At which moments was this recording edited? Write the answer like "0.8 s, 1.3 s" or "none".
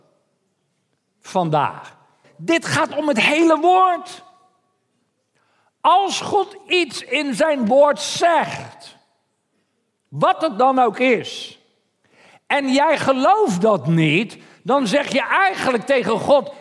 2.2 s